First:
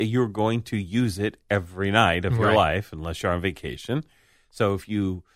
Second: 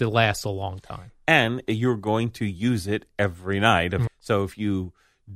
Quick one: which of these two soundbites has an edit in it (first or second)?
second